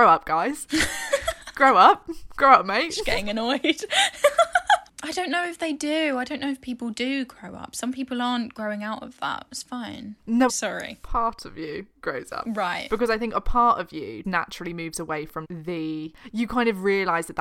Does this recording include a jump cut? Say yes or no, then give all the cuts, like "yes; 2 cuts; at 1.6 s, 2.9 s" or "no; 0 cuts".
yes; 3 cuts; at 10.5 s, 14.2 s, 15.4 s